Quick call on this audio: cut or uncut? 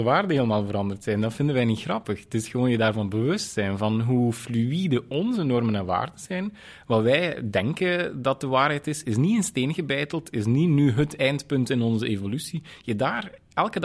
uncut